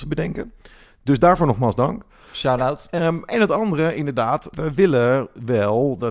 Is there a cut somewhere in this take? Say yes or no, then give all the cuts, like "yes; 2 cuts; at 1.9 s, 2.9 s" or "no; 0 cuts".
yes; 1 cut; at 4.5 s